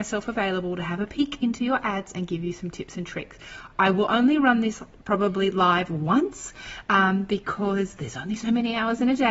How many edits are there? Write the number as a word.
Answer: zero